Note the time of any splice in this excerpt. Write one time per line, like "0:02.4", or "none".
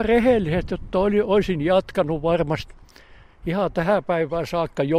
none